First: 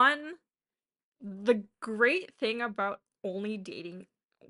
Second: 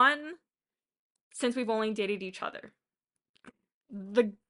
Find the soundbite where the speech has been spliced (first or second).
first